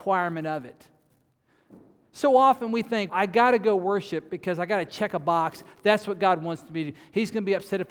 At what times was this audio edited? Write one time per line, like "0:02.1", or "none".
0:03.1